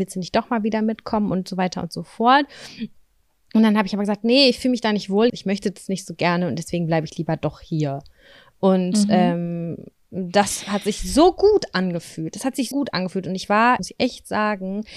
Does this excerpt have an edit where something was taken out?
yes; 3 cuts; at 5.3 s, 12.7 s, 13.8 s

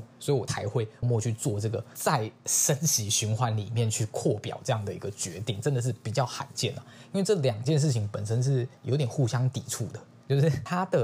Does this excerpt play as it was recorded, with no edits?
no; 1 cut; at 1.0 s

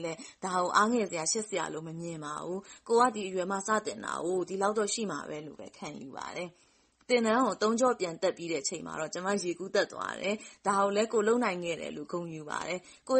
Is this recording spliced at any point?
no; 0 cuts

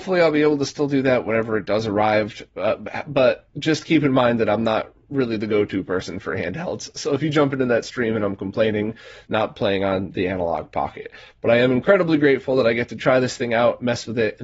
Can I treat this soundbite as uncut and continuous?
no; 1 cut; at 9.3 s

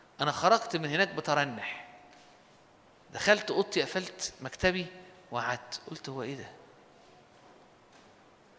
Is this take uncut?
yes; 0 cuts

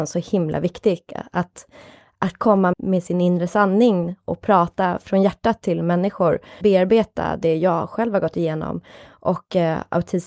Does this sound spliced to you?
yes; 2 cuts; at 2.7 s, 6.6 s

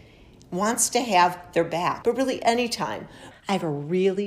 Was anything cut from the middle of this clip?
yes; 2 cuts; at 2.0 s, 3.3 s

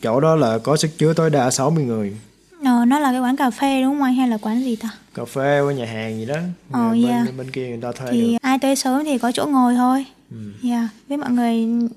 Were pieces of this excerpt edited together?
yes; 1 cut; at 8.4 s

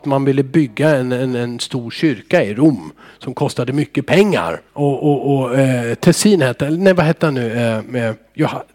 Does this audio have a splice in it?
yes; 1 cut; at 4.7 s

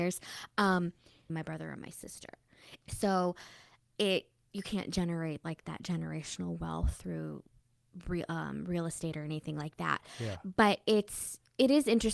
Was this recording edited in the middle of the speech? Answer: yes; 2 cuts; at 1.3 s, 2.8 s

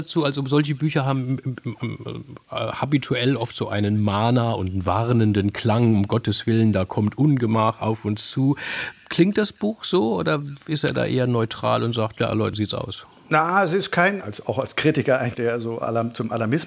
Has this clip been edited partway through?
yes; 3 cuts; at 12.5 s, 14.2 s, 15.3 s

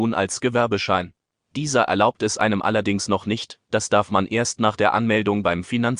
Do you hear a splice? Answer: yes; 1 cut; at 3.6 s

